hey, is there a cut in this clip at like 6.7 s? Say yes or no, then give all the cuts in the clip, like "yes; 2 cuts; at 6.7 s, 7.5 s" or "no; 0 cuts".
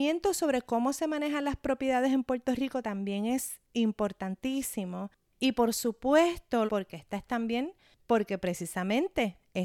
yes; 1 cut; at 6.7 s